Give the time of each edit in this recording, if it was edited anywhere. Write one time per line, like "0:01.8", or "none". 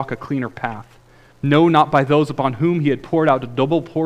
0:01.3